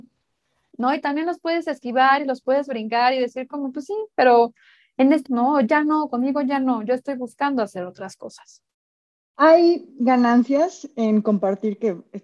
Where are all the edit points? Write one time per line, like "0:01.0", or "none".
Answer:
0:05.3

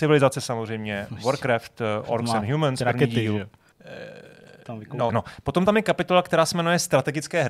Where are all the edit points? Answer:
0:03.7
0:05.1

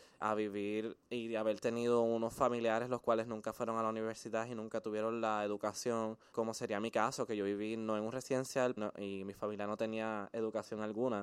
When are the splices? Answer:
0:06.3
0:08.8

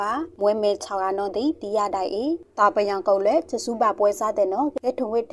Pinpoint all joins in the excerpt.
none

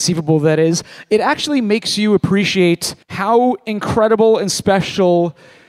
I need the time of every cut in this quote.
0:03.0

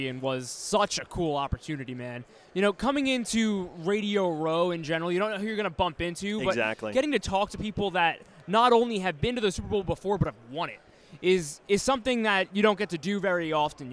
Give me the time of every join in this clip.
none

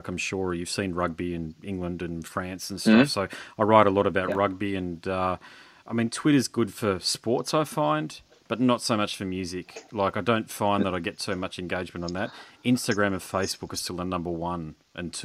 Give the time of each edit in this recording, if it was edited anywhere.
none

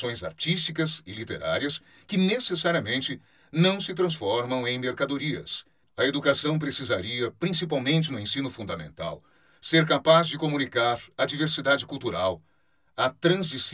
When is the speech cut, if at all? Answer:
0:05.8

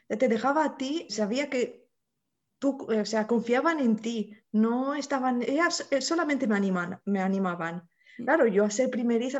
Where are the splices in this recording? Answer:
0:01.1
0:05.4
0:08.2

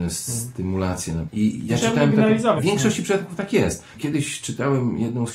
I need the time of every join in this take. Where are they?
0:01.3
0:02.6
0:04.0

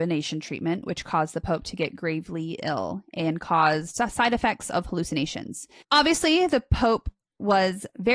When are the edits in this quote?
0:05.8

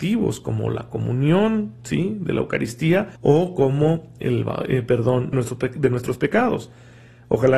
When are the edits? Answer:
0:03.2
0:05.3

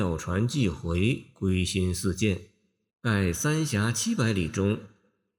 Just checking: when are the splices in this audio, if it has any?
0:02.9

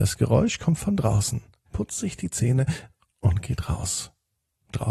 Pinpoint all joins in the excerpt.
0:01.7

